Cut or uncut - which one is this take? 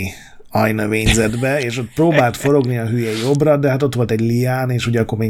uncut